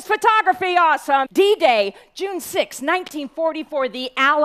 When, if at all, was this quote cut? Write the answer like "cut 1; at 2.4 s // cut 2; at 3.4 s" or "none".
cut 1; at 1.3 s